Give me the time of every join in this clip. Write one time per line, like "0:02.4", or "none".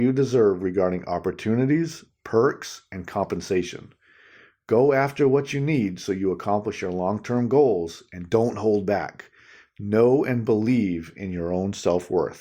none

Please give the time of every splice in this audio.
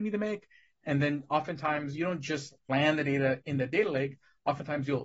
none

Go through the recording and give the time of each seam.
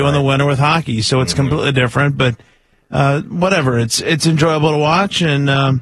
none

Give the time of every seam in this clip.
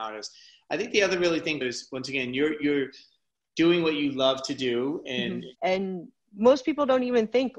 0:01.6
0:05.5

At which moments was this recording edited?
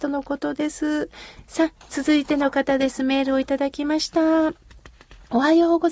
0:01.4

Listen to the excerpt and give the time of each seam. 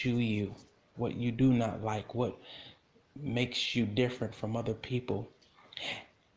0:00.9

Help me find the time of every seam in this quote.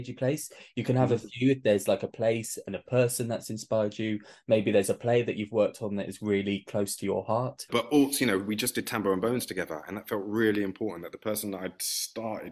0:07.7

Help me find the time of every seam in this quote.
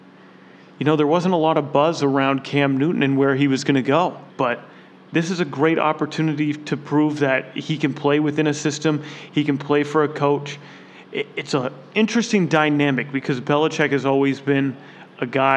0:04.3

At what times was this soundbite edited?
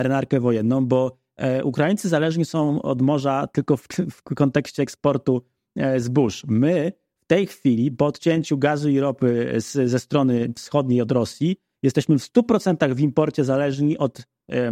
none

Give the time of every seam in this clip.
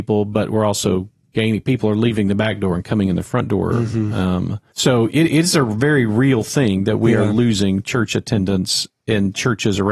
0:04.7

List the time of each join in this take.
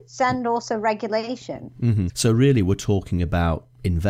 0:02.1

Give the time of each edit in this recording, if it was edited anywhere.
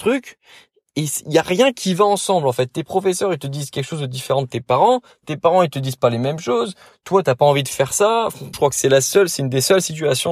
0:08.5

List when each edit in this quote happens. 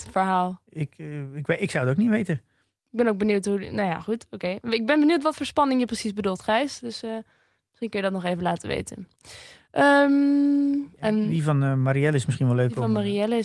none

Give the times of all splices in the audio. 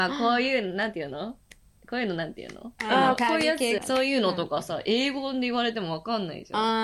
0:03.8

